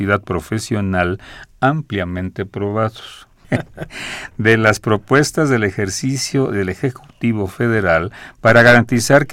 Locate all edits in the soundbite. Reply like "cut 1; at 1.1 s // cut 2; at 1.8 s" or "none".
cut 1; at 3.4 s